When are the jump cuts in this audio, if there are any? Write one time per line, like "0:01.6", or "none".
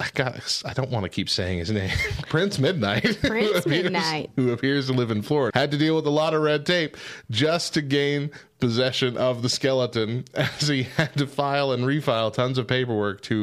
0:05.5